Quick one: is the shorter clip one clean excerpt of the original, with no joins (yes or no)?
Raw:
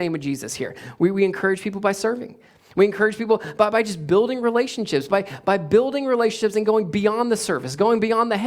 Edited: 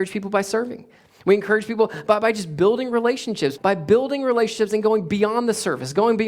no